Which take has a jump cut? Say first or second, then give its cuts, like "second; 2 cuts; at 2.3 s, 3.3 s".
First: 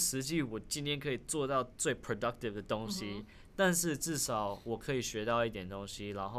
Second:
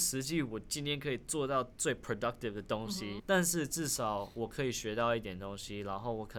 second; 1 cut; at 3.2 s